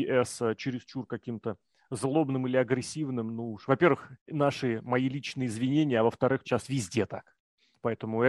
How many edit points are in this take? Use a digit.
2